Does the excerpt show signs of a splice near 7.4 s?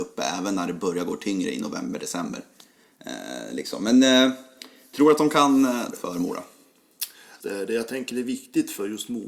yes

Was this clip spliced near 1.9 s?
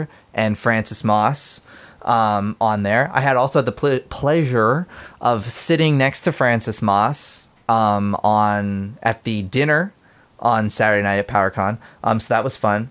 no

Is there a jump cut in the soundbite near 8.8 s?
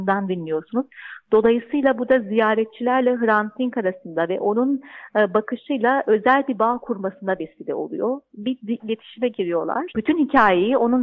yes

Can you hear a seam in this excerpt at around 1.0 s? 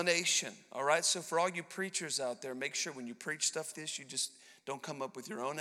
no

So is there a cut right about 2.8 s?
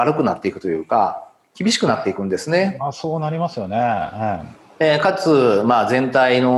no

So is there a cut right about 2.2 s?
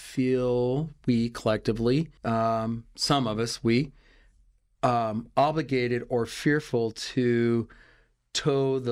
yes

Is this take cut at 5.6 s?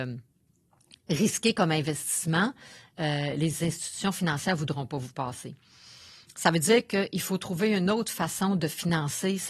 no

